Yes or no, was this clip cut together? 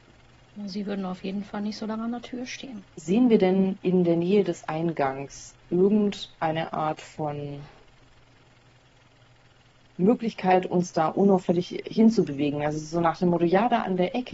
yes